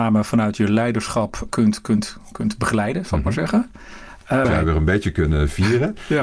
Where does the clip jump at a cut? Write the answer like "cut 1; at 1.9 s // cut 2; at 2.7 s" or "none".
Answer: cut 1; at 1.5 s // cut 2; at 4.4 s